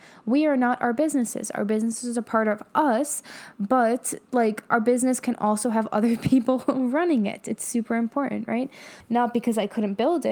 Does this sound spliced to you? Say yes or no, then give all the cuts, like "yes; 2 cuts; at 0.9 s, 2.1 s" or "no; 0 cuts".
yes; 1 cut; at 9.0 s